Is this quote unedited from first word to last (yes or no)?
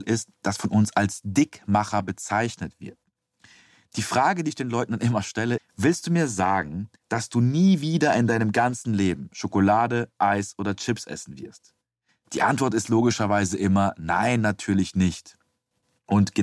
no